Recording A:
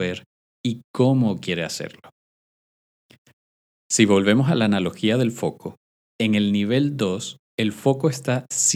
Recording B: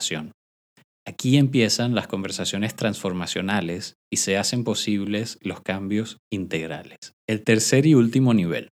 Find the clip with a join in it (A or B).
B